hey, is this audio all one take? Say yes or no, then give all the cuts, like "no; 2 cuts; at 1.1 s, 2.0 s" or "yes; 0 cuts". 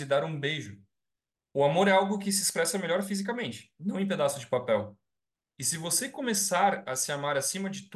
no; 1 cut; at 1.4 s